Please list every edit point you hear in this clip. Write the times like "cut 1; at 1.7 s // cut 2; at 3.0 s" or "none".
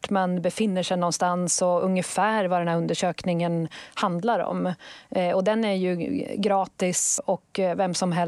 cut 1; at 7.2 s